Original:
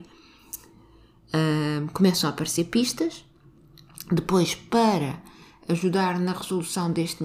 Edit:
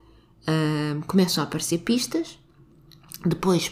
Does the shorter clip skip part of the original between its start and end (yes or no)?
no